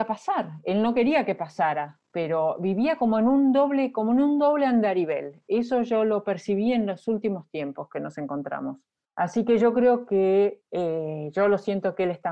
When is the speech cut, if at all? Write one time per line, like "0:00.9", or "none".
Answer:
0:09.1
0:10.6